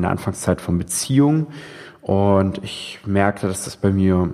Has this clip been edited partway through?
no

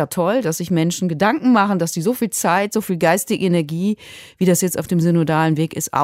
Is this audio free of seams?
yes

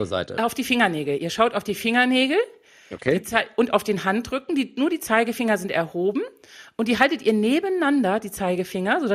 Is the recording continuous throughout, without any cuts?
yes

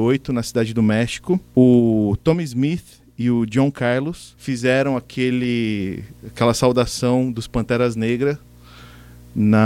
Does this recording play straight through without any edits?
yes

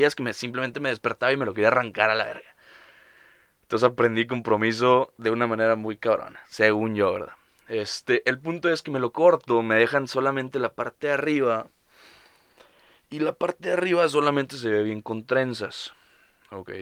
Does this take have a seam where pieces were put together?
no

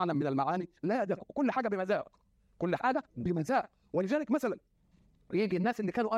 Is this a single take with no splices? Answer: no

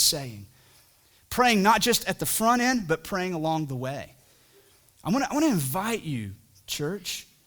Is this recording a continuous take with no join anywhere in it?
yes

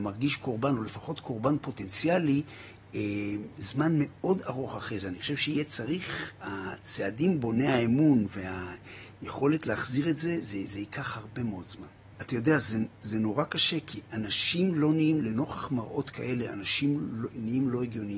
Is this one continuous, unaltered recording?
no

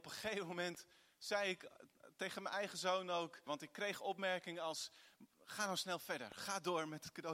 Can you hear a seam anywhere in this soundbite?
yes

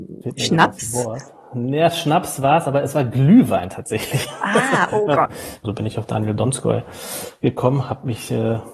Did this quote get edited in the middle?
yes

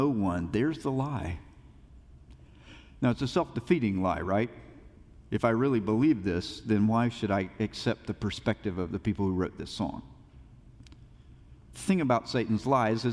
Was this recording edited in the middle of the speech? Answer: yes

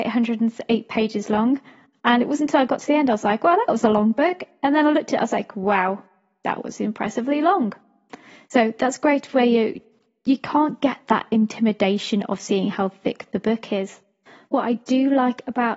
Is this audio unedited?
yes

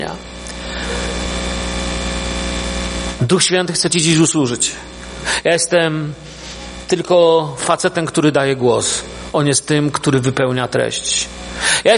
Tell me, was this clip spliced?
yes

